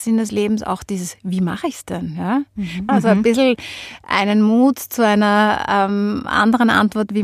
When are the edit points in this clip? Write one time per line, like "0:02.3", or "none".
0:02.9